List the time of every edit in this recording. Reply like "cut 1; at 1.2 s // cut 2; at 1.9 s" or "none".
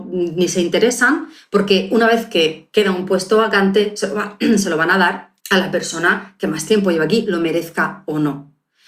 cut 1; at 5.4 s